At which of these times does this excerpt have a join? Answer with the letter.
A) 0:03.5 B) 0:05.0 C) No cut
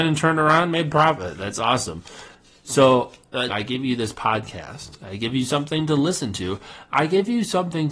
A